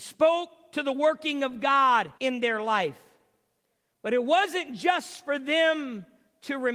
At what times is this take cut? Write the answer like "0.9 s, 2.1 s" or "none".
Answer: 2.2 s

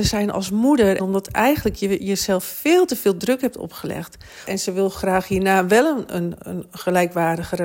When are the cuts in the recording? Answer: 1.0 s, 4.5 s

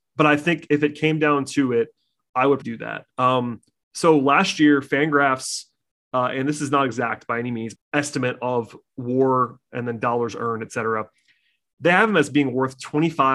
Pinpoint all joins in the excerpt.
2.6 s, 7.7 s

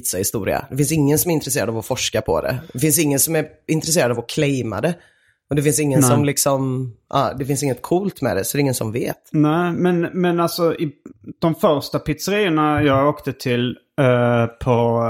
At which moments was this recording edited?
none

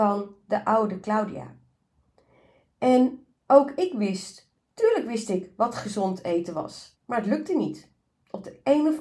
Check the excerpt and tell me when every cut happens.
6.9 s

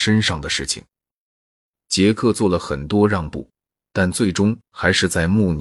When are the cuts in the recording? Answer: none

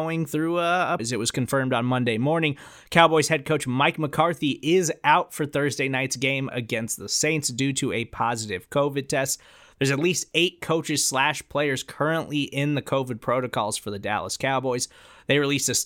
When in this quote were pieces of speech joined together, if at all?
1.0 s

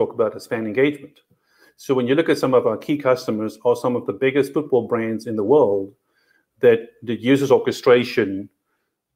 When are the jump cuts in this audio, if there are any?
none

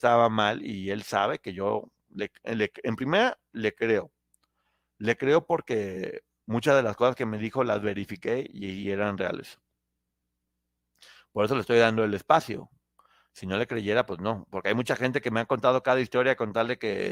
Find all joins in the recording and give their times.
none

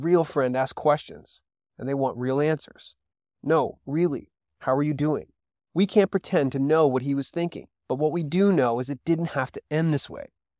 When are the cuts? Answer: 3.3 s, 5.5 s, 7.8 s

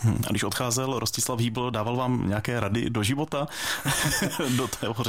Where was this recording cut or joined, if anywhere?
none

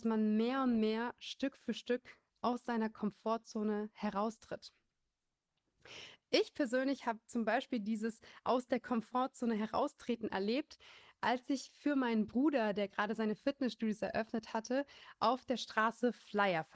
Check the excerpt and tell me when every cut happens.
none

